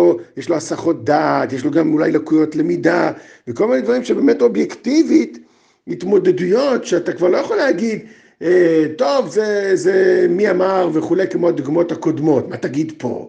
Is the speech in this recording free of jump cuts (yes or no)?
yes